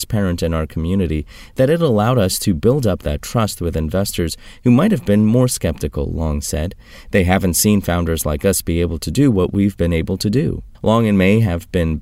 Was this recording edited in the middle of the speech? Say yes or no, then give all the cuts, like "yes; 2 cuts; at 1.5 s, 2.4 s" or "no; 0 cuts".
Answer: yes; 1 cut; at 10.7 s